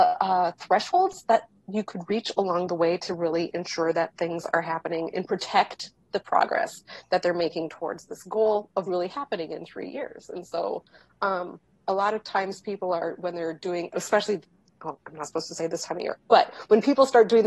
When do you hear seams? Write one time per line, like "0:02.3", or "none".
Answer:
0:08.9